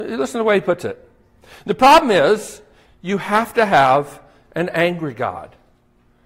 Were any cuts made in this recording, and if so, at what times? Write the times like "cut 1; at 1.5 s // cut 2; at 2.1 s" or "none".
cut 1; at 2.8 s

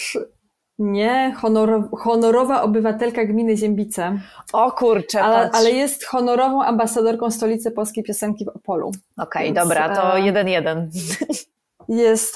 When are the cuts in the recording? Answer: none

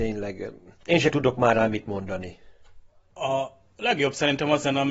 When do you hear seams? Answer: none

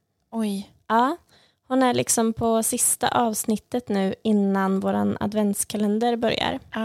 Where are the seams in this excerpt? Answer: none

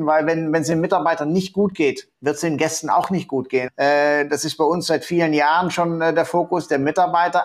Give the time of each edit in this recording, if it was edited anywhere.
cut 1; at 2.1 s // cut 2; at 3.7 s

